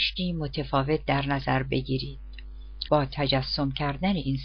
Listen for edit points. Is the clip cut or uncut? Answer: cut